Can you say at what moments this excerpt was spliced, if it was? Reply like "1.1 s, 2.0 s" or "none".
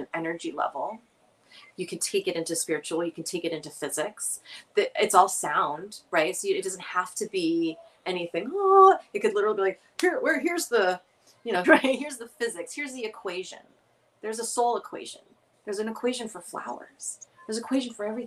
11.6 s